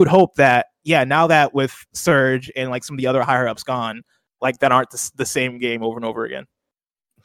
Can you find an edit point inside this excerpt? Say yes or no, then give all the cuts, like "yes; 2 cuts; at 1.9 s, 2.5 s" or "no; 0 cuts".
yes; 1 cut; at 4.4 s